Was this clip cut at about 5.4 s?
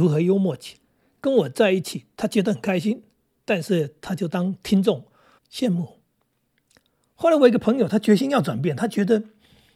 yes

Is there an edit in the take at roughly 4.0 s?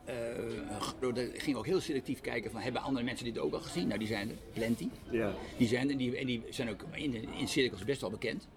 no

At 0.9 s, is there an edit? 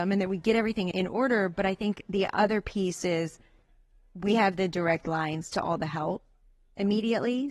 yes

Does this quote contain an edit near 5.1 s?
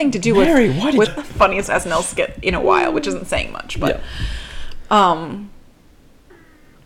no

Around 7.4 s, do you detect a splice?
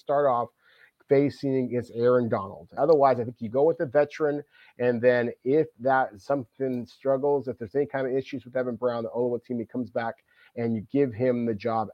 no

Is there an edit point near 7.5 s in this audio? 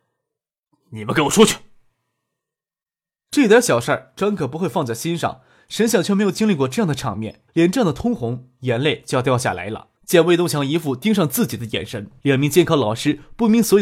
yes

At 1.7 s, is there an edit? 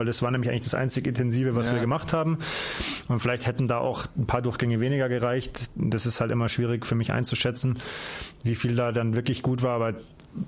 no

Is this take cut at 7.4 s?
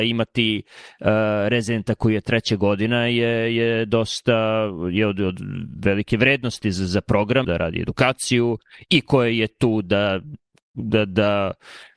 yes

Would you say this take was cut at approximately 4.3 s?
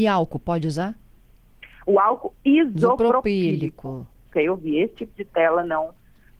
yes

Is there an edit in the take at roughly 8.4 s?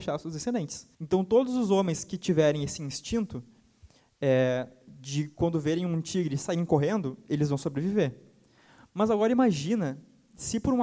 no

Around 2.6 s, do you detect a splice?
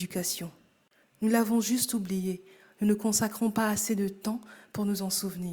no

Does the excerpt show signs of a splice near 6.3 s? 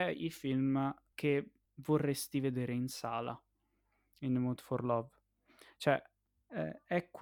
no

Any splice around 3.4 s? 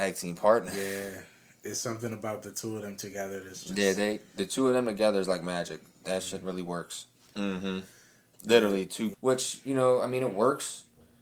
no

